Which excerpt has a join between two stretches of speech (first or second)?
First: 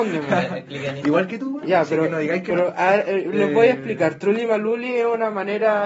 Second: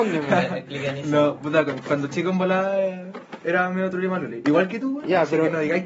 first